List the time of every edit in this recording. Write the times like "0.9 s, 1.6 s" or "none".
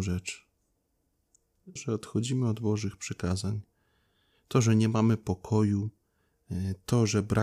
1.8 s